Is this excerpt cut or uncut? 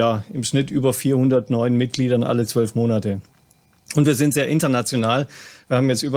uncut